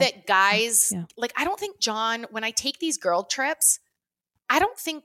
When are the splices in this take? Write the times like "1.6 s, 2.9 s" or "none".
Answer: none